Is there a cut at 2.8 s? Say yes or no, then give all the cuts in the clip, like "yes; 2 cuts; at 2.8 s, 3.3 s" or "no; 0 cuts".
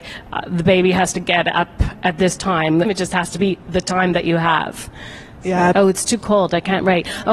yes; 2 cuts; at 2.8 s, 5.7 s